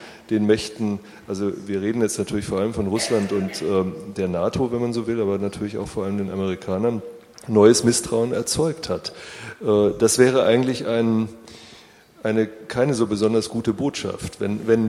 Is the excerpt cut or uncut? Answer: uncut